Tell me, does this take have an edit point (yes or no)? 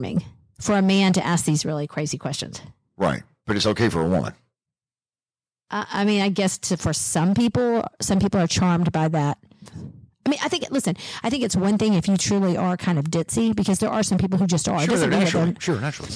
no